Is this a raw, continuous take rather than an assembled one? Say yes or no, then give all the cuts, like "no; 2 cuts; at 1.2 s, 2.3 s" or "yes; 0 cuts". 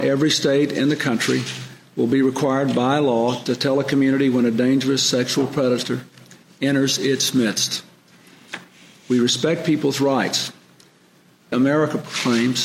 no; 1 cut; at 11.5 s